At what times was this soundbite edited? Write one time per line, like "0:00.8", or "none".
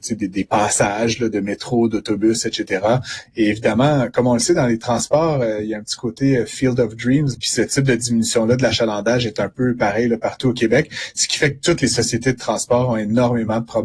0:07.3